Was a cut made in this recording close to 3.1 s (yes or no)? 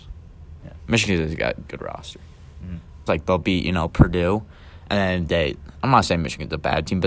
yes